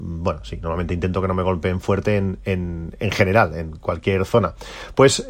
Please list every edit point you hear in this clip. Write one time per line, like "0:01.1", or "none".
none